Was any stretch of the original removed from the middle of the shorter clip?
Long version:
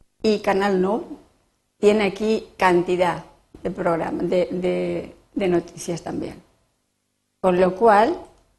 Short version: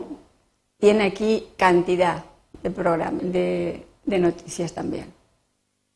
yes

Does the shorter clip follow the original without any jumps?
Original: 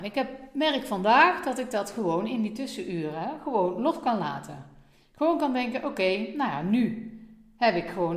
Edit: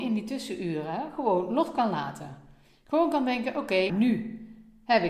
no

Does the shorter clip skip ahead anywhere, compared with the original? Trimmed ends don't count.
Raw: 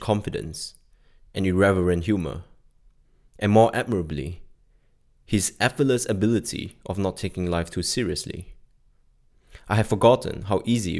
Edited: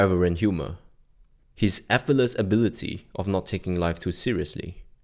yes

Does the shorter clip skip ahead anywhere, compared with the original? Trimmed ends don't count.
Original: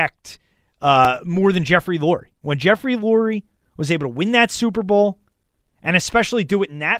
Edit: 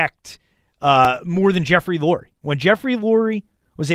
no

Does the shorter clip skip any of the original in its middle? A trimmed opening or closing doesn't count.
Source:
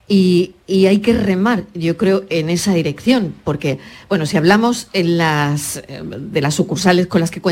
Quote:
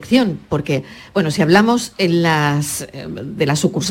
no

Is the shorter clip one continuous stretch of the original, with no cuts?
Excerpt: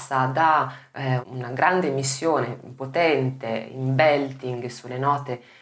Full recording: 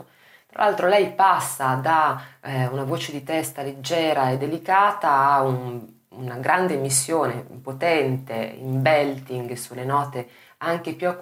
no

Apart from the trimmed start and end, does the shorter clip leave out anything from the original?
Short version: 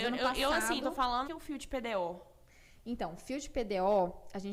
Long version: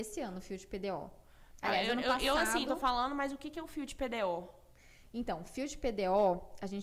yes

